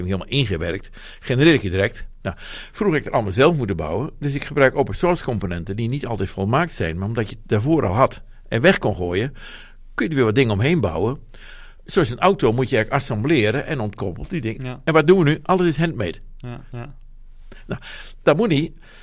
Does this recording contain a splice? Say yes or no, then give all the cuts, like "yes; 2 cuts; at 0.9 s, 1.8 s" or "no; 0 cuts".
yes; 3 cuts; at 2.2 s, 14.6 s, 16.7 s